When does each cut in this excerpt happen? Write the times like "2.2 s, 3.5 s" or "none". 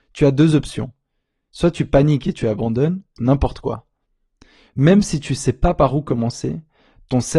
3.2 s